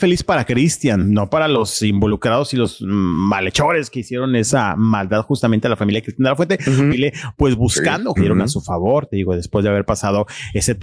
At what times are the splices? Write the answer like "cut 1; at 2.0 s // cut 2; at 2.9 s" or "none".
cut 1; at 6.9 s // cut 2; at 8.2 s